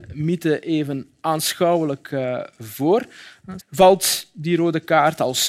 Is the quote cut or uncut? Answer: cut